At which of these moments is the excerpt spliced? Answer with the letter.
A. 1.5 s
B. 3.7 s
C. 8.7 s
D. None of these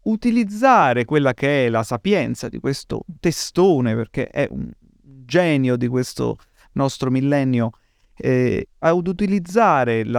C